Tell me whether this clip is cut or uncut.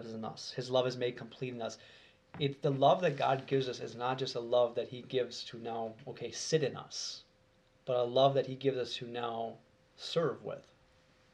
uncut